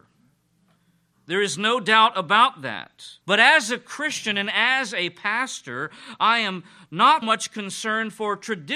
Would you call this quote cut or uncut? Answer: cut